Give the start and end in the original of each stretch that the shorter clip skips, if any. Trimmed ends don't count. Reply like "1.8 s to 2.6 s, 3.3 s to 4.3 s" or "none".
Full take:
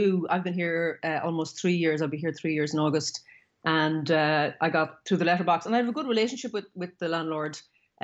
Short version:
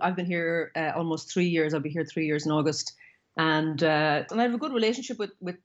4.6 s to 5.6 s

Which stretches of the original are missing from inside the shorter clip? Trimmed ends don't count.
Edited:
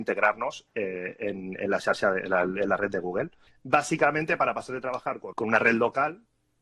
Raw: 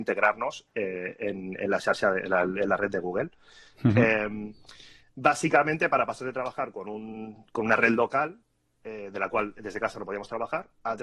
3.5 s to 5.0 s, 6.8 s to 7.5 s

